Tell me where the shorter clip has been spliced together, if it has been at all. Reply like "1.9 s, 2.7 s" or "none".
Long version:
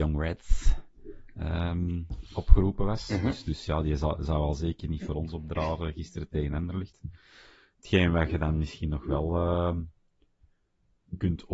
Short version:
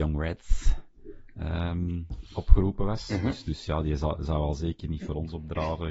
none